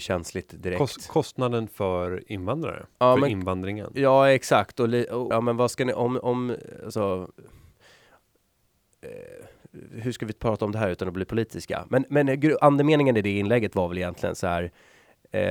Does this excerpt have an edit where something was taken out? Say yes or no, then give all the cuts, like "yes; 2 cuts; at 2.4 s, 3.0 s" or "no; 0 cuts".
yes; 1 cut; at 5.3 s